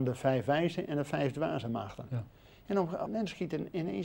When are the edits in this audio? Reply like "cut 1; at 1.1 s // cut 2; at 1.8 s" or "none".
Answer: cut 1; at 3.1 s